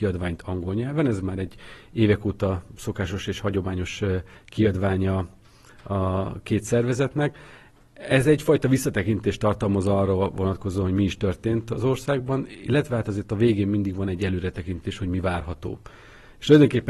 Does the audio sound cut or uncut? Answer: uncut